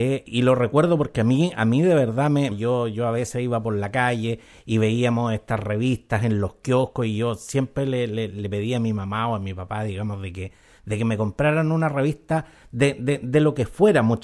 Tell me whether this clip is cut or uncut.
cut